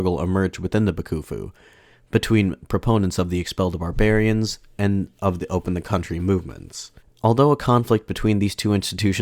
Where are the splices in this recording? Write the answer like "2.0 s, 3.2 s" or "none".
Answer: 7.0 s